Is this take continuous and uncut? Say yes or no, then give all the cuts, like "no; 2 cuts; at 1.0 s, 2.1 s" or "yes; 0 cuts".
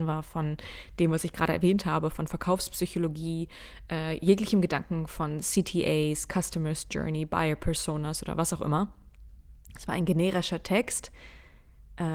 yes; 0 cuts